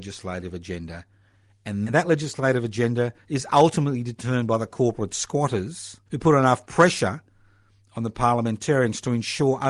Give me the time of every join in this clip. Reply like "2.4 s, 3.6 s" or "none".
1.8 s, 6.1 s